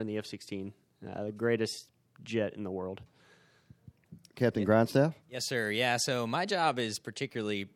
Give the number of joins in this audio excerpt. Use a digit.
1